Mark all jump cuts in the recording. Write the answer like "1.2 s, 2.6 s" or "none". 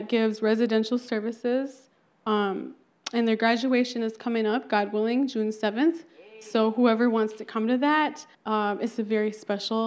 8.3 s

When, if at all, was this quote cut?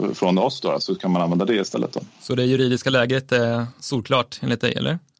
none

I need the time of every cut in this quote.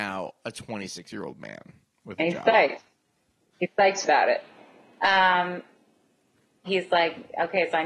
3.5 s, 6.6 s

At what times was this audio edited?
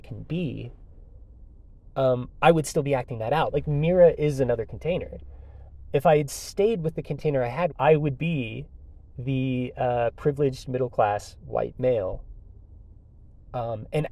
3.5 s, 5.9 s, 7.7 s

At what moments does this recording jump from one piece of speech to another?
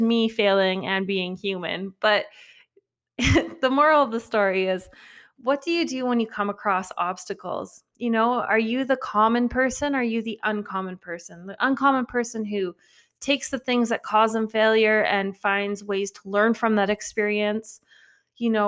none

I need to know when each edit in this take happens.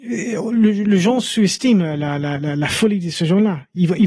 none

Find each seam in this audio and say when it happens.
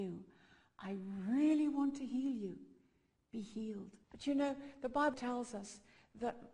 4.0 s, 5.1 s

